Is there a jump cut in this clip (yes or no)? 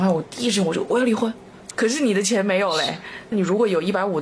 yes